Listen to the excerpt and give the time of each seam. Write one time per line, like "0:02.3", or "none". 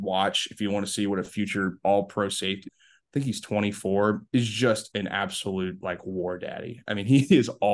0:02.7
0:04.3